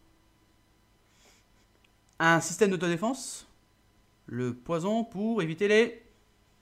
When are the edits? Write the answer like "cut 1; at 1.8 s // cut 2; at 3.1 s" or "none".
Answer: cut 1; at 2.1 s